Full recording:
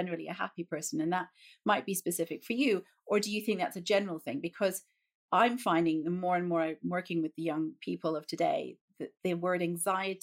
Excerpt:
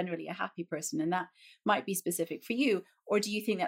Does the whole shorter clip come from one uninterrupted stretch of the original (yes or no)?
yes